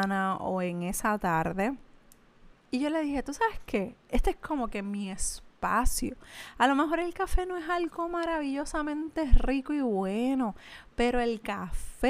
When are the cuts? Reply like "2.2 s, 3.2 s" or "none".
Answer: 2.5 s